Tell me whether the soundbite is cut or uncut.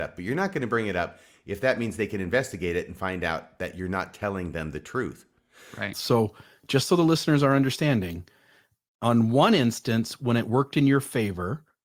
cut